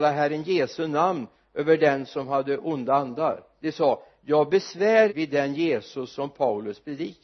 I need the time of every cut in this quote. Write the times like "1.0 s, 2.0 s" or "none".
5.1 s